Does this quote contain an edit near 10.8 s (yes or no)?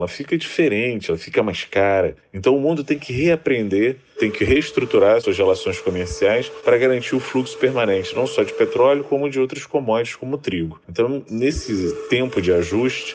yes